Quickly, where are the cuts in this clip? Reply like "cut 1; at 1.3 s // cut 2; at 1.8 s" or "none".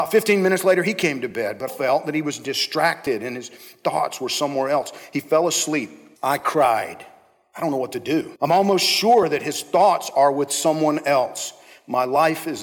cut 1; at 1.7 s // cut 2; at 8.4 s